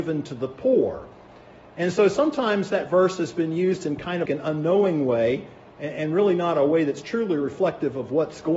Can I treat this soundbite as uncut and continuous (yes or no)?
no